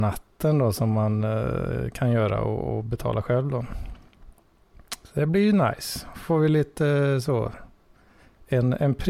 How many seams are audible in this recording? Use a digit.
0